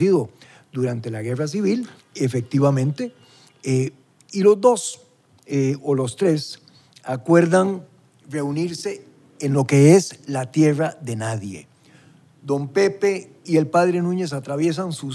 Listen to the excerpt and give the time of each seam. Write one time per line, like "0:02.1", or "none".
0:02.0